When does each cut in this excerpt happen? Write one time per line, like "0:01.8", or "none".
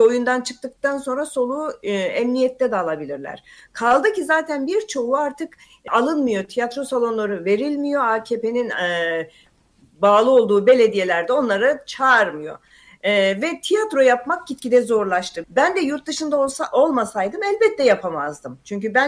0:05.9
0:15.4

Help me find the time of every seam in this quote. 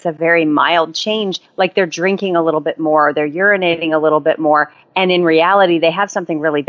none

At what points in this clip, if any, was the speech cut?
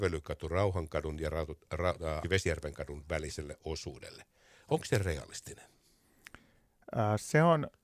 0:02.2

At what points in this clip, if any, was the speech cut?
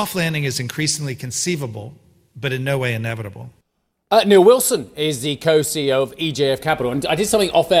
none

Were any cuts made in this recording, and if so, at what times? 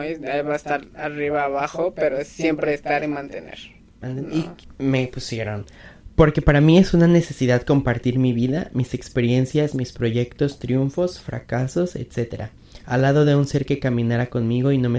0:04.6

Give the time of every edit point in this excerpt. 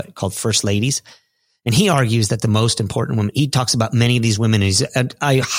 0:03.3

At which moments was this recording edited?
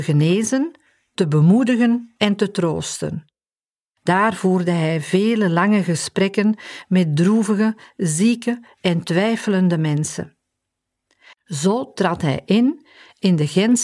0:04.0
0:11.3

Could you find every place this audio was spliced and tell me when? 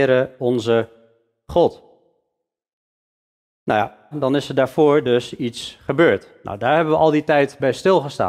0:04.1

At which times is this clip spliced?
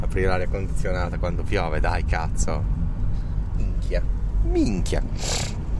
0:03.6

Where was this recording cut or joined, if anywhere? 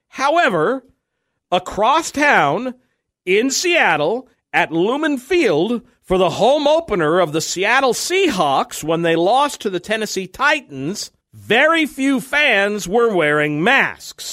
0:04.3
0:11.2

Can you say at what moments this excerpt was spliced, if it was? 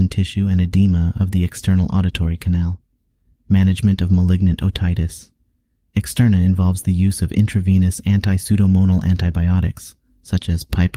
none

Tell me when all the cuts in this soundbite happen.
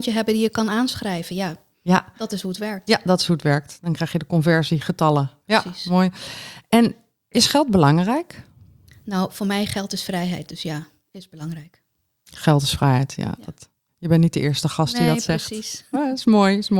none

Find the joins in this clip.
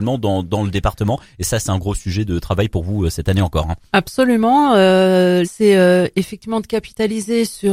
0:05.4

